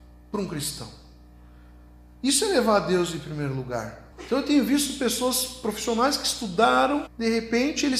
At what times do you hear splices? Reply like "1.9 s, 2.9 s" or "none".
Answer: 4.1 s, 7.1 s